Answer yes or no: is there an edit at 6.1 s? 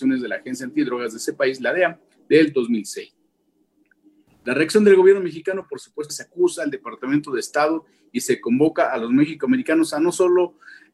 yes